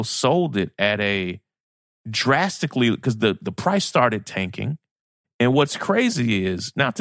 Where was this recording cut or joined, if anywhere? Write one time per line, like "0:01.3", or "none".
0:05.2